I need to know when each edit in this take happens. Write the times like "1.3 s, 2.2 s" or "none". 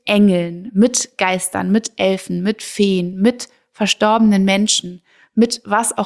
none

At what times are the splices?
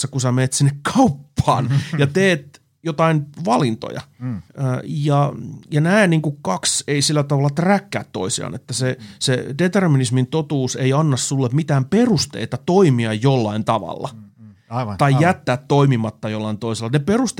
4.5 s

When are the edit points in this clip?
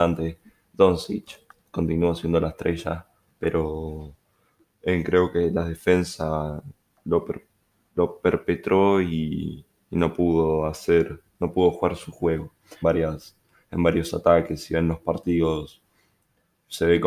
12.8 s

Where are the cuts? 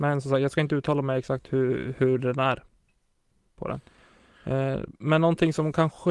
none

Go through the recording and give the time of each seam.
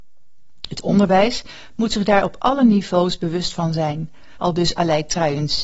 4.4 s

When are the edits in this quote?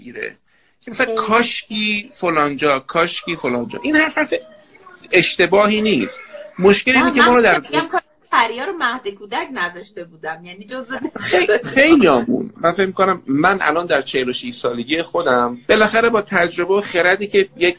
11.1 s, 15.6 s

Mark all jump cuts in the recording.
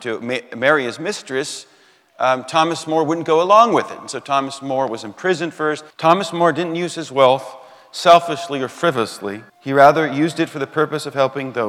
5.9 s, 9.5 s

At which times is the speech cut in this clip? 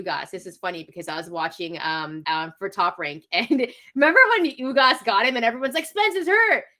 2.2 s

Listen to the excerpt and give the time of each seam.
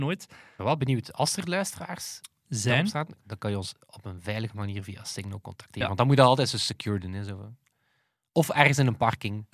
none

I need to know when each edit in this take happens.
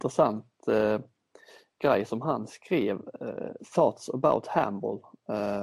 none

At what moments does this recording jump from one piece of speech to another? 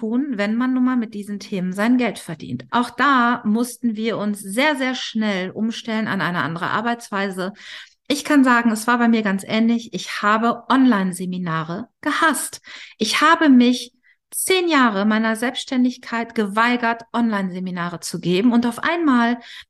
2.7 s

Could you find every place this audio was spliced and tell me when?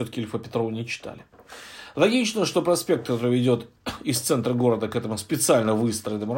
none

